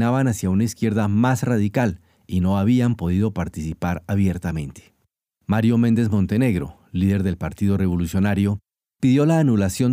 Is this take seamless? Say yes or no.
no